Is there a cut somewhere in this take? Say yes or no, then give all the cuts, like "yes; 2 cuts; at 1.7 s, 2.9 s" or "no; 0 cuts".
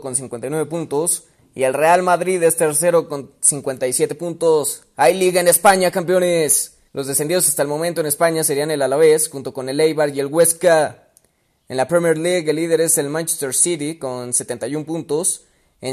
yes; 1 cut; at 6.9 s